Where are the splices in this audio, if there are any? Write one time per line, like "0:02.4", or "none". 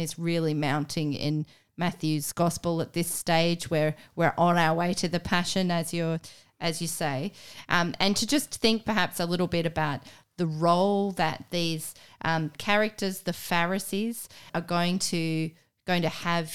0:14.5